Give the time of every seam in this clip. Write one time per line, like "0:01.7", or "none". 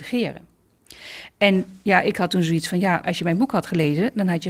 0:03.0